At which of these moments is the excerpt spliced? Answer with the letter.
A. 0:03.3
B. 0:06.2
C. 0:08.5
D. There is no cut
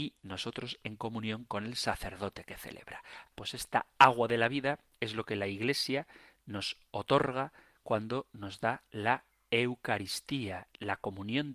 A